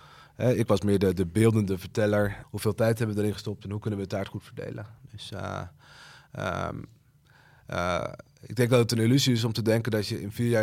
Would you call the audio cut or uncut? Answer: cut